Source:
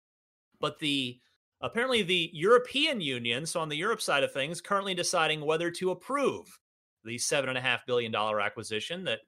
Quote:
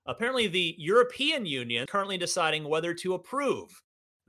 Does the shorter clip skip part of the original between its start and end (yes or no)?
yes